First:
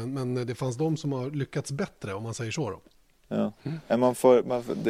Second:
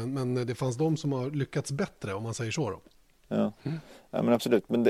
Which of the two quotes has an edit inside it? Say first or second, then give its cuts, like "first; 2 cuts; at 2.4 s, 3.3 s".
first; 1 cut; at 3.9 s